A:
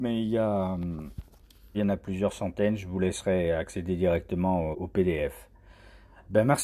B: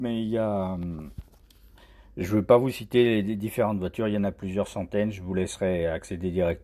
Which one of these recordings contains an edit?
A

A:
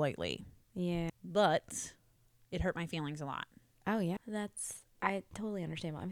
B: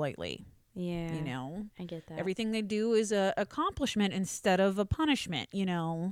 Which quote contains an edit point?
A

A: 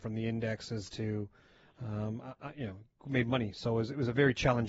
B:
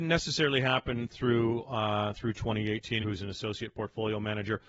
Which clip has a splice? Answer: B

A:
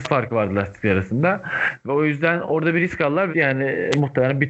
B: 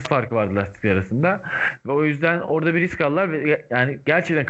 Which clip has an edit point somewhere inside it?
A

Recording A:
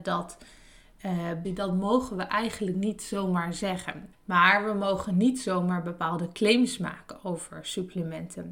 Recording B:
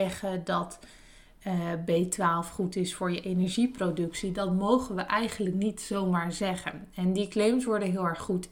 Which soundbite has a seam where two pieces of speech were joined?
A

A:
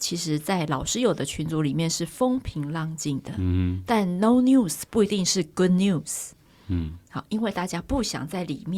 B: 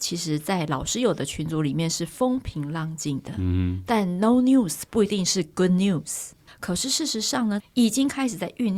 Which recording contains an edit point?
B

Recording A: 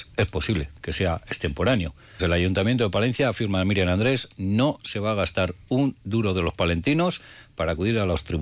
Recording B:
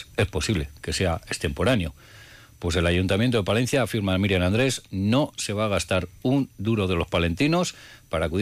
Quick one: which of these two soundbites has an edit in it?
A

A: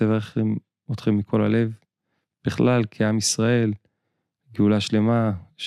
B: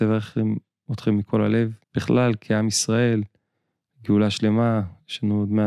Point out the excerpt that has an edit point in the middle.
B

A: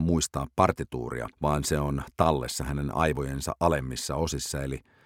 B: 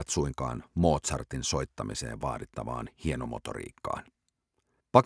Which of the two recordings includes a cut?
A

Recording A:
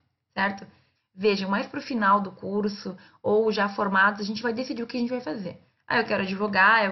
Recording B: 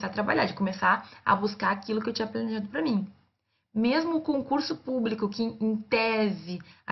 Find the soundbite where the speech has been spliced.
A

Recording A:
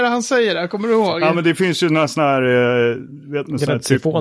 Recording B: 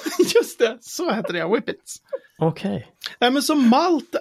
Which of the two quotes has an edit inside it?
B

